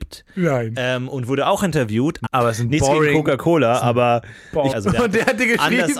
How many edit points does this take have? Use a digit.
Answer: 2